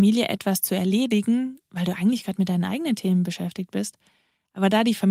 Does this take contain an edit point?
no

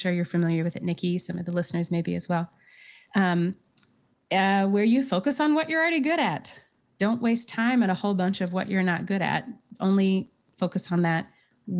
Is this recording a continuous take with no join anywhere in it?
yes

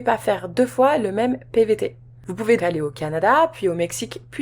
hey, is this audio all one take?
no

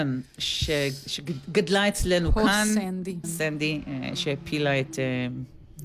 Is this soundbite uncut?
no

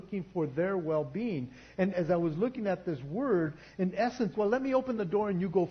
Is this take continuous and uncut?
no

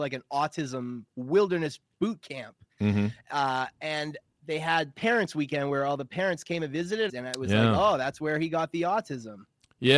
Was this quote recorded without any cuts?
no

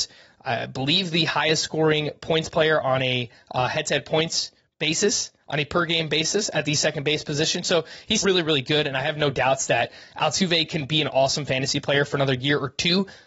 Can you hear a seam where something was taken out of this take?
yes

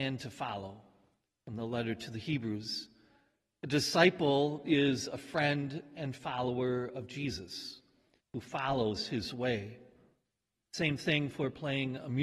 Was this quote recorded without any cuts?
no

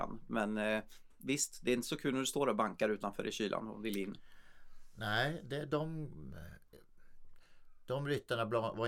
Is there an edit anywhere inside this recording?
no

